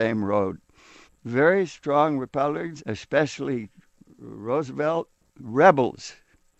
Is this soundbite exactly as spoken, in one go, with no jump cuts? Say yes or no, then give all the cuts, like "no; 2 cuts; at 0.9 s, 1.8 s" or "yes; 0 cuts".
no; 2 cuts; at 1.0 s, 2.8 s